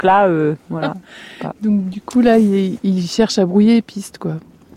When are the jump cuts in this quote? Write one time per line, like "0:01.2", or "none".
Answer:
none